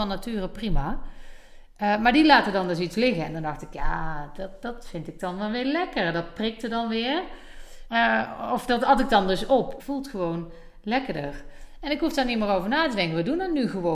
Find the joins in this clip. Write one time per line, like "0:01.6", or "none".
0:07.9
0:09.8